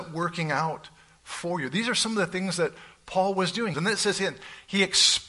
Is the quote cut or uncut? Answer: cut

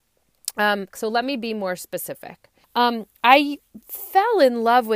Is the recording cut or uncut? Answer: cut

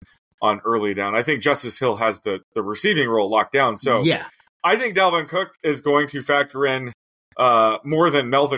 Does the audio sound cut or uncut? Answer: uncut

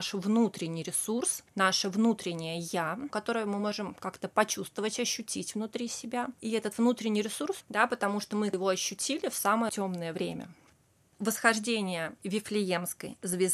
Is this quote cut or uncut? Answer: cut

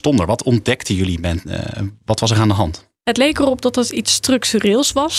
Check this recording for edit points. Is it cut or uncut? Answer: uncut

